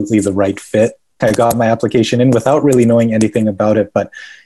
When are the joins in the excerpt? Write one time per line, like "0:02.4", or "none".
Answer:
0:01.2